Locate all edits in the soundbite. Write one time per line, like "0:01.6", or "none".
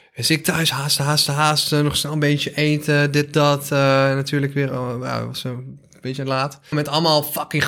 0:06.7

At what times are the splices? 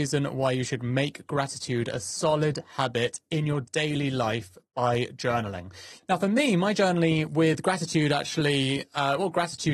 0:06.0

